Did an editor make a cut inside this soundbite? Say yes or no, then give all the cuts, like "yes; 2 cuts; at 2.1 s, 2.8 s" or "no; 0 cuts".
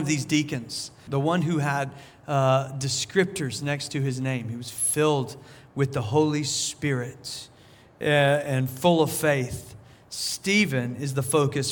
yes; 1 cut; at 1.1 s